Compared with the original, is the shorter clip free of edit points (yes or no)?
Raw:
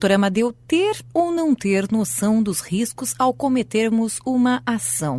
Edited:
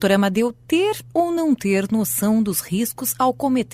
yes